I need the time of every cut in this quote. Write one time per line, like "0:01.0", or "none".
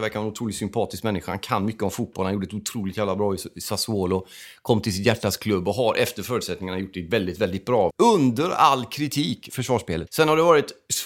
0:07.9
0:10.1